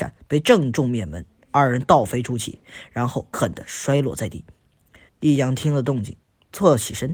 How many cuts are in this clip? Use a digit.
2